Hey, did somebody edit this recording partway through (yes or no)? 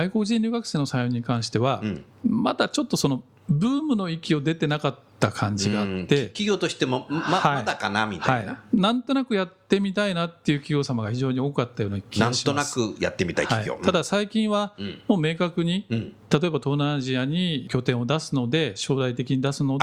no